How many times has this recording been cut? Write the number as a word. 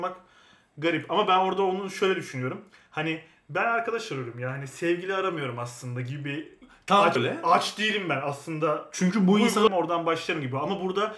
two